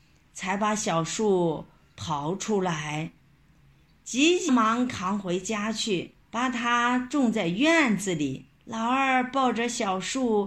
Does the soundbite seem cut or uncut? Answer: cut